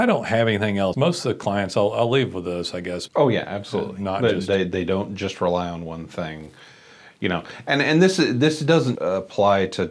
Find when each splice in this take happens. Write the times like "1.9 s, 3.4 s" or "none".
0.9 s, 3.1 s, 8.9 s